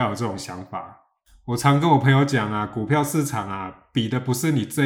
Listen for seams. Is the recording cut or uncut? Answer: uncut